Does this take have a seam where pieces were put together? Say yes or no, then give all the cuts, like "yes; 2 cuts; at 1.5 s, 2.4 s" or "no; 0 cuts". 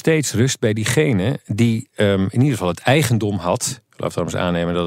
no; 0 cuts